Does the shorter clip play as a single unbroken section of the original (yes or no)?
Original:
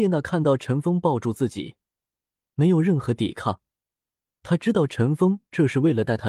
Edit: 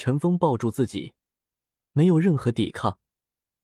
yes